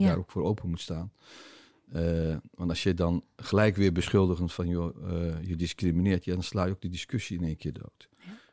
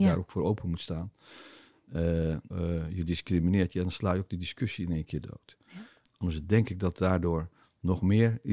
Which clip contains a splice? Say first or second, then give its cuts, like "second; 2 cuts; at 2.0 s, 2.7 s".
second; 2 cuts; at 2.5 s, 6.1 s